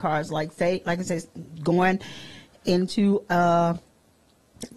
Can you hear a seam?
no; 0 cuts

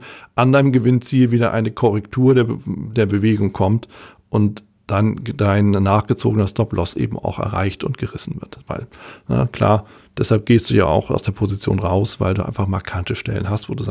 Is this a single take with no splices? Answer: yes; 0 cuts

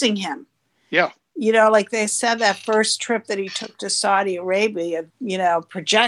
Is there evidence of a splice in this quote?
yes; 1 cut; at 5.1 s

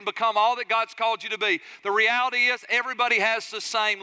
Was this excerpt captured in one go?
yes; 0 cuts

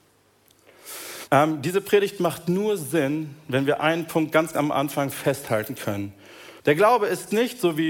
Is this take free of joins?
no; 2 cuts; at 1.3 s, 6.6 s

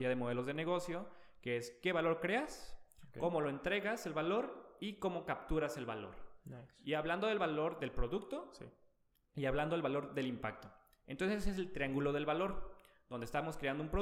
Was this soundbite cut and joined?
no; 0 cuts

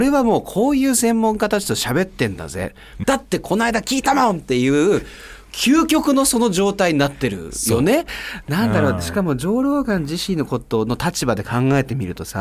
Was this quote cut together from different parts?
yes; 2 cuts; at 3.0 s, 8.1 s

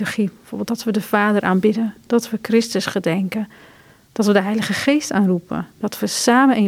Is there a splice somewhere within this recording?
no; 0 cuts

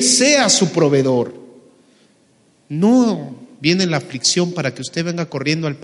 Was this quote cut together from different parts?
no; 0 cuts

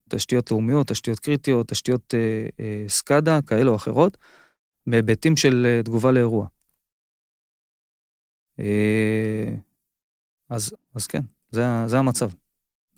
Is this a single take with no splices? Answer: no; 1 cut; at 10.7 s

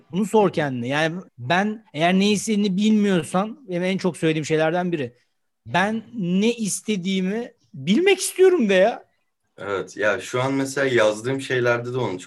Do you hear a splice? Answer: yes; 1 cut; at 1.3 s

